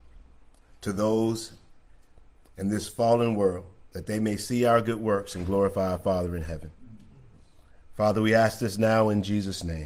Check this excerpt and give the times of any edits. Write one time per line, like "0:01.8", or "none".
none